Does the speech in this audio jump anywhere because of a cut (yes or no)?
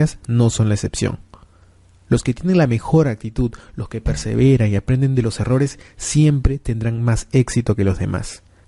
no